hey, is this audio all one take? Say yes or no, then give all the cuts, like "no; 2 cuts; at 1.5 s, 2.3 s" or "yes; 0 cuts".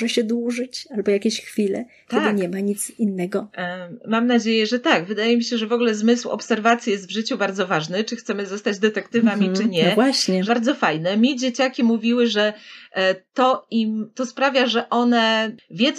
no; 1 cut; at 10.5 s